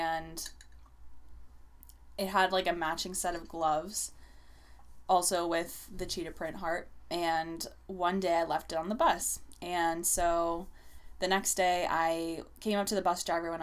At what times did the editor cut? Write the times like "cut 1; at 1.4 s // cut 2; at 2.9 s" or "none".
none